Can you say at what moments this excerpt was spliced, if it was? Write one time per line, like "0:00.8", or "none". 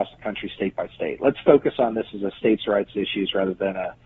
none